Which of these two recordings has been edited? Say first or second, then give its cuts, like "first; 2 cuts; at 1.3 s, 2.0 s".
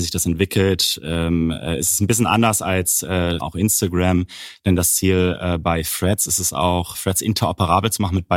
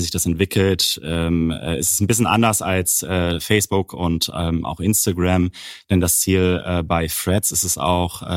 first; 2 cuts; at 3.4 s, 6.9 s